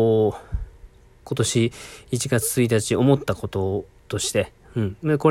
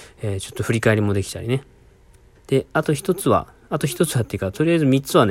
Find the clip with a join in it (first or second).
second